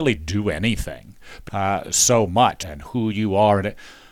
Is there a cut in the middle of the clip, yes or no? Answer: yes